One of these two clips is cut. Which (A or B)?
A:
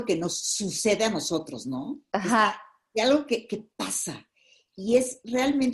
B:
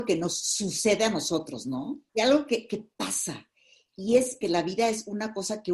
B